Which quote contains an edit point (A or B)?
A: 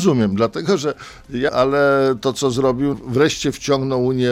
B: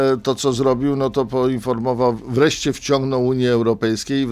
A